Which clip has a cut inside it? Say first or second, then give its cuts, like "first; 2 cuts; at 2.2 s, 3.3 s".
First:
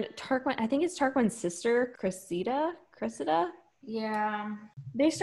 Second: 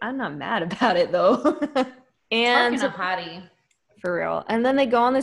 first; 1 cut; at 2.0 s